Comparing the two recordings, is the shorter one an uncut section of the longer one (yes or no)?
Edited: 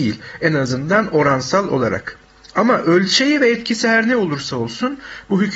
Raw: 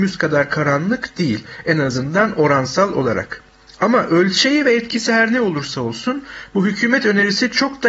yes